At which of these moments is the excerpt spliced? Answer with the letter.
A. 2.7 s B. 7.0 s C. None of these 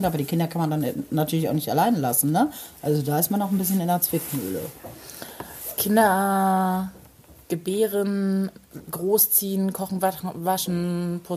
C